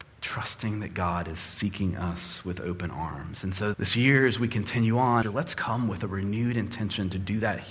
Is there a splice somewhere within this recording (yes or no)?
yes